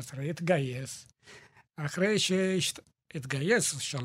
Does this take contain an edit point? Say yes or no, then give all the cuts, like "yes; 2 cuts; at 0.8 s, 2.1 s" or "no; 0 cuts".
no; 0 cuts